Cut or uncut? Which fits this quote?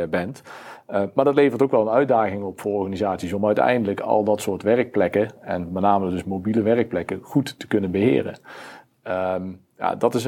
uncut